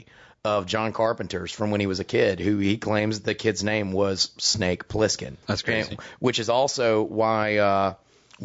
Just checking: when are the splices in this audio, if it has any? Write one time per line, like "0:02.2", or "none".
0:05.4

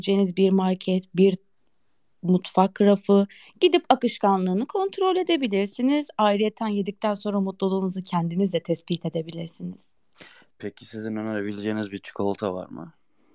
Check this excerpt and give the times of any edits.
0:01.1

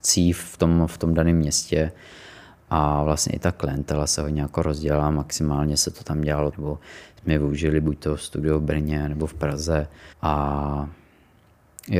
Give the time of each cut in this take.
0:06.5
0:10.1

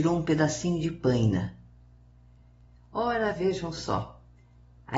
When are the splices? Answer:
none

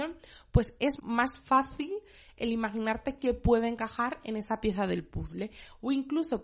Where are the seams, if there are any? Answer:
0:01.0

